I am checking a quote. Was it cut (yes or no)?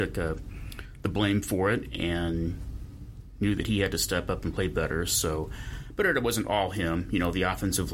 no